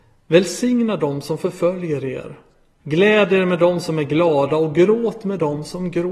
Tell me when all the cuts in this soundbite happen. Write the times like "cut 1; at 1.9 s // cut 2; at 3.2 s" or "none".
cut 1; at 2.8 s